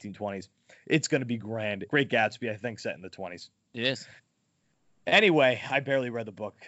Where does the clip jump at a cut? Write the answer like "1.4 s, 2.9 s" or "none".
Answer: 1.9 s